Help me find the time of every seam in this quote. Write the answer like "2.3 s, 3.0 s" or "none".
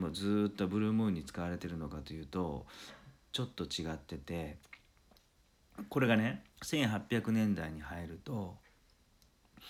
6.5 s